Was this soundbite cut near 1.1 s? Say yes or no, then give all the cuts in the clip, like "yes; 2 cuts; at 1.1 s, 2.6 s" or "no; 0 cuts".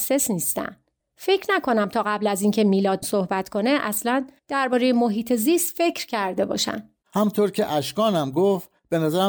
no; 1 cut; at 7.0 s